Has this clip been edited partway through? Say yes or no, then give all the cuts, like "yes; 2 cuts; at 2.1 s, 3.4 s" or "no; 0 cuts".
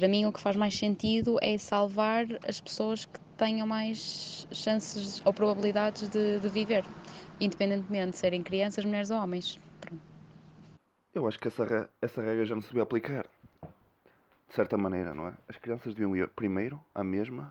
no; 0 cuts